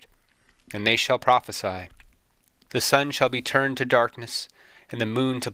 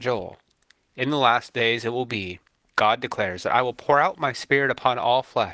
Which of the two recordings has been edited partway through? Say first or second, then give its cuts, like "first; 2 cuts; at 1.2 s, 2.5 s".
first; 1 cut; at 2.7 s